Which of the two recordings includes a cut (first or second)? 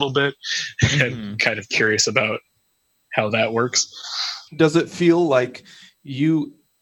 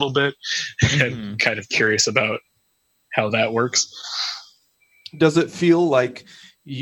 first